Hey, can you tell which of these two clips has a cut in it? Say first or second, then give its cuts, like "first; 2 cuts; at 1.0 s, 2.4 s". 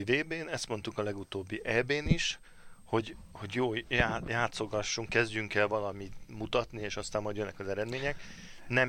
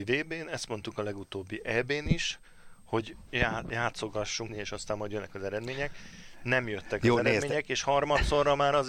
second; 2 cuts; at 3.3 s, 4.5 s